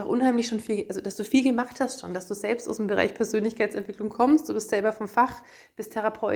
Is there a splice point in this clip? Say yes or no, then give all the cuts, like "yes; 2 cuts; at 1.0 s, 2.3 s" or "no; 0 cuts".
no; 0 cuts